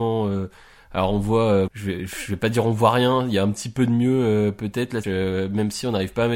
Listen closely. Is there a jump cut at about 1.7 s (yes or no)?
yes